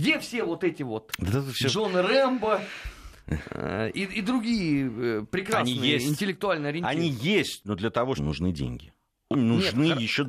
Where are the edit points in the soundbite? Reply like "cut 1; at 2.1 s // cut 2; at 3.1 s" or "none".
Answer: cut 1; at 8.2 s // cut 2; at 9.3 s